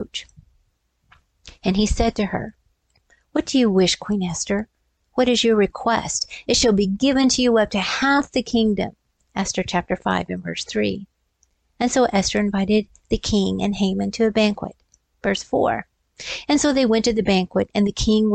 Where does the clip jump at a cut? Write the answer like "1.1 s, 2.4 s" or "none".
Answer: none